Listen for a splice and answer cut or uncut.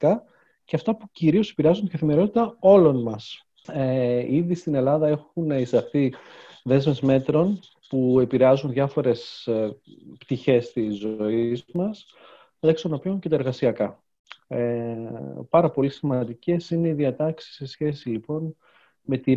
cut